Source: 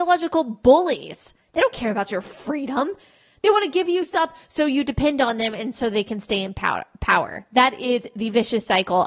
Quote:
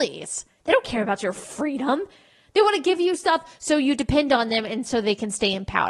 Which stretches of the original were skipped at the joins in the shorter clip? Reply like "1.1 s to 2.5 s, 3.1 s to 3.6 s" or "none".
none